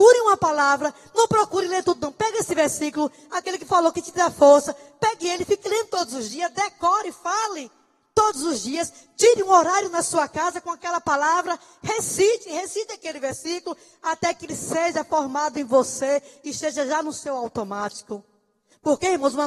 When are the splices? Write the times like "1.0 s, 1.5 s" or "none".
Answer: none